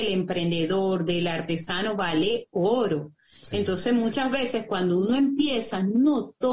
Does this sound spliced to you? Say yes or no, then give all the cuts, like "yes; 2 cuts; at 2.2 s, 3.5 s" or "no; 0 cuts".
no; 0 cuts